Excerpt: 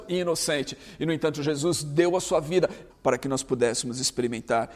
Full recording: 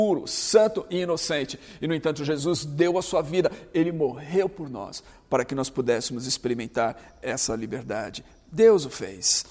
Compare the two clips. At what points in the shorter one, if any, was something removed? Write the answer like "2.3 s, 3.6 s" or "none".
2.9 s